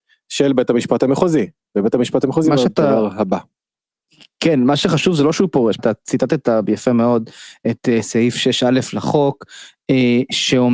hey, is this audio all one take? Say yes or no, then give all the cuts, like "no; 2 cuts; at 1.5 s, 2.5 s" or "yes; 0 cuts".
no; 1 cut; at 5.8 s